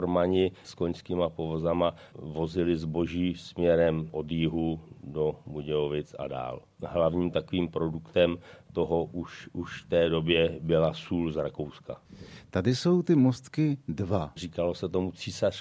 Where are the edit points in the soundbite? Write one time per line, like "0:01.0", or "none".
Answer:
0:14.4